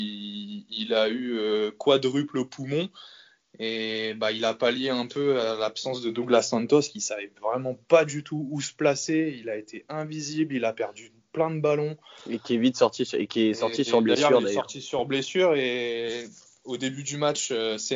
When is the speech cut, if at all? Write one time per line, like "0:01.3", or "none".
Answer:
none